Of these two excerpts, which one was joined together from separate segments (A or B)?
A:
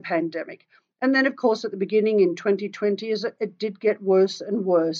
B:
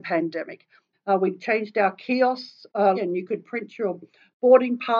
B